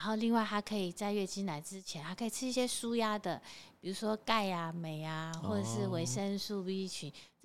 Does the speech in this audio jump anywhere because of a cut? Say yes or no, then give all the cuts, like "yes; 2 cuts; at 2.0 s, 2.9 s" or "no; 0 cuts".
no; 0 cuts